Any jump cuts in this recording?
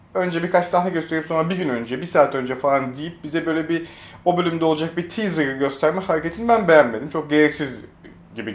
no; 0 cuts

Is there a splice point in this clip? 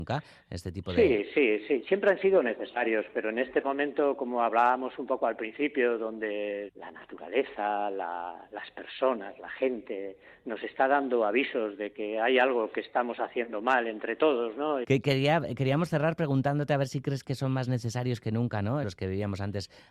yes; 3 cuts; at 6.7 s, 14.8 s, 18.8 s

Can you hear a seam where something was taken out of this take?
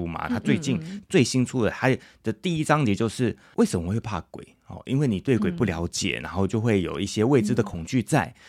no; 0 cuts

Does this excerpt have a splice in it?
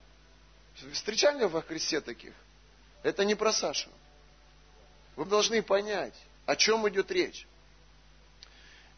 yes; 2 cuts; at 3.0 s, 5.3 s

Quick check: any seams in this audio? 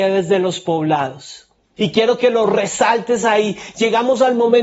yes; 1 cut; at 1.8 s

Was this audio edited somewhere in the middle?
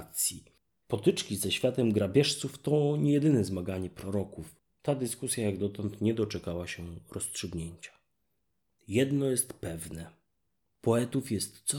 yes; 1 cut; at 4.7 s

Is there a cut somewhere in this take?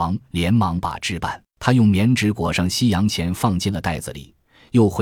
yes; 1 cut; at 1.5 s

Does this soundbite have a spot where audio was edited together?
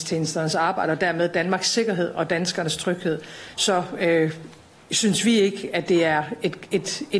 no; 0 cuts

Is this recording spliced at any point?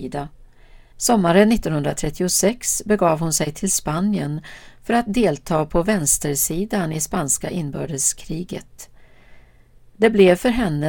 yes; 1 cut; at 0.9 s

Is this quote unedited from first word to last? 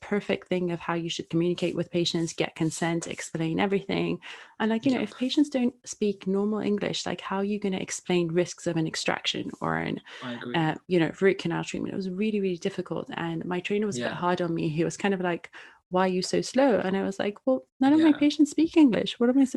yes; 0 cuts

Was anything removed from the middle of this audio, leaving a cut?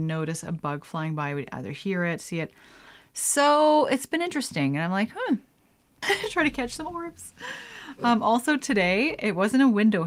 yes; 1 cut; at 6.0 s

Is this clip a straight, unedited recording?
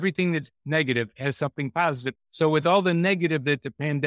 no; 1 cut; at 2.2 s

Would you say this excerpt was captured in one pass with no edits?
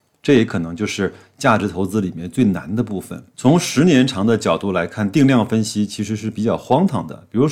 yes; 0 cuts

